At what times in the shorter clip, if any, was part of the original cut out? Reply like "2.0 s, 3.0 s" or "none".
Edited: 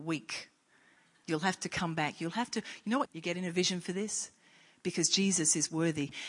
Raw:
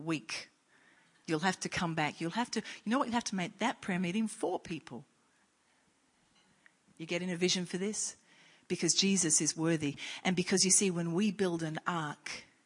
3.1 s